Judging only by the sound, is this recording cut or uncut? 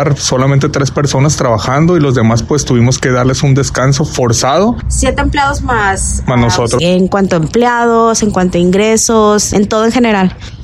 cut